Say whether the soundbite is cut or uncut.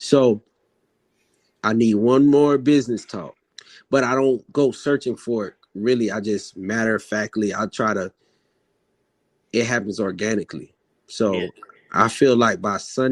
uncut